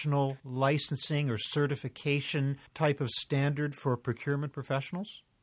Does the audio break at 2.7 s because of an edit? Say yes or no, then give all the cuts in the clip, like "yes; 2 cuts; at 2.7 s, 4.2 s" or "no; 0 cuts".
yes; 1 cut; at 2.7 s